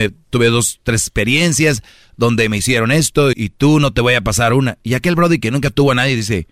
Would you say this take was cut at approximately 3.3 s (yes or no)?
yes